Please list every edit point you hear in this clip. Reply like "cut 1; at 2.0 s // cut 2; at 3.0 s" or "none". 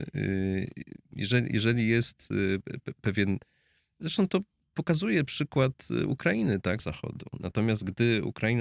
cut 1; at 6.8 s